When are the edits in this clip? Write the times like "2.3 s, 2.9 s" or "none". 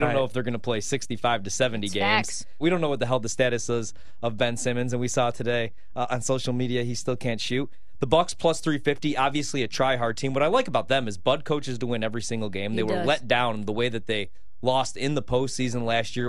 2.6 s